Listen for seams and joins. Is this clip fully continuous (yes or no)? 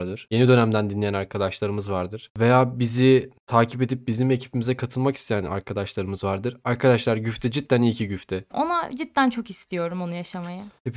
no